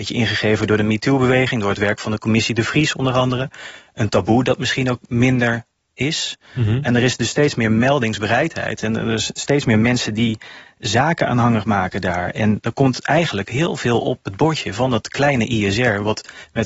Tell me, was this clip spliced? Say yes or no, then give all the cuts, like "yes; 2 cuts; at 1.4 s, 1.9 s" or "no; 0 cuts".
no; 0 cuts